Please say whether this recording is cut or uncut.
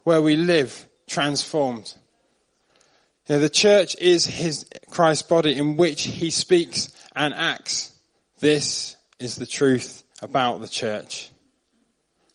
cut